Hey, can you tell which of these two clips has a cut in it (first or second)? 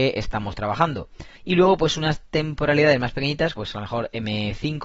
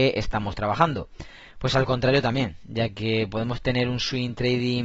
first